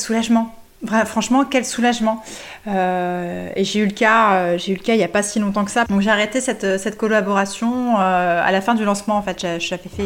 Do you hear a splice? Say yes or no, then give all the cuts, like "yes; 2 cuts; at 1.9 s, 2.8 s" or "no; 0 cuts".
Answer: yes; 1 cut; at 5.9 s